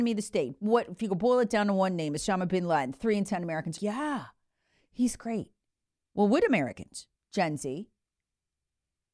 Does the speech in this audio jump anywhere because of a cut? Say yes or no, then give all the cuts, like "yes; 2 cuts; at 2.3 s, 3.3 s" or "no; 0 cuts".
yes; 1 cut; at 3.8 s